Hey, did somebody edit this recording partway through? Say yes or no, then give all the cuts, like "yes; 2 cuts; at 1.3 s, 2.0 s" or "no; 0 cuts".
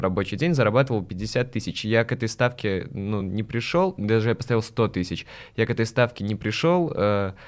no; 0 cuts